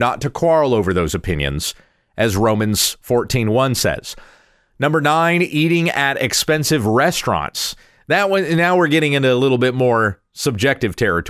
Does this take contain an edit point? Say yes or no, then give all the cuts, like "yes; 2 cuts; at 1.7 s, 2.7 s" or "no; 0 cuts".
no; 0 cuts